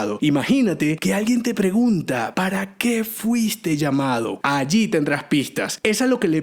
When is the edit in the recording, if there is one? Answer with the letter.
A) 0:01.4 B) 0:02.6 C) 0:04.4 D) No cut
C